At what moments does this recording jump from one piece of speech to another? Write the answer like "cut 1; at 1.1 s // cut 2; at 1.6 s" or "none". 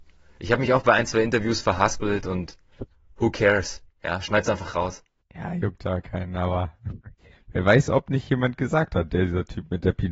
none